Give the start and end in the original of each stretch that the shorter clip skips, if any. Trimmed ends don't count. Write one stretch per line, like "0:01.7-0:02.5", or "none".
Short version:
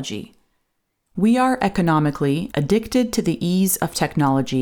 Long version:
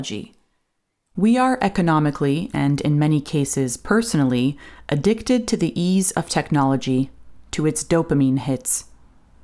0:02.5-0:04.9